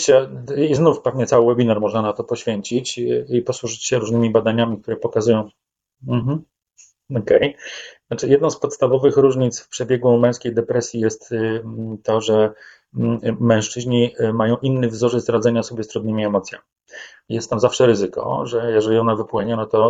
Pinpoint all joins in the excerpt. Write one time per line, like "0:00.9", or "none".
0:17.2